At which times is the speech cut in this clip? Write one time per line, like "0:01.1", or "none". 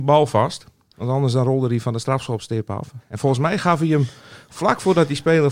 none